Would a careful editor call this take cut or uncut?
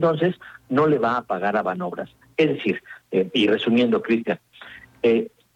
cut